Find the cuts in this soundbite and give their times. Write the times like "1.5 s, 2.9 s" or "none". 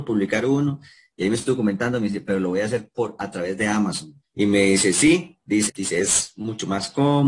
4.2 s, 5.7 s